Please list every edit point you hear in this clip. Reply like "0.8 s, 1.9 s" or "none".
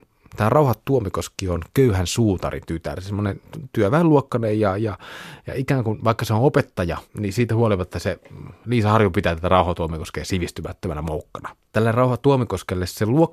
7.1 s, 11.7 s